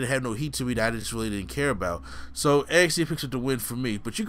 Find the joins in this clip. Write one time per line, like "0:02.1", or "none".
none